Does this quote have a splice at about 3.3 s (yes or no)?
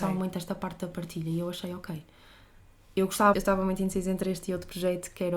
yes